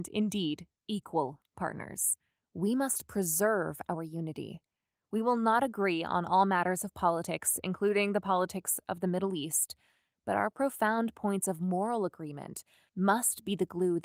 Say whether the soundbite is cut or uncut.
cut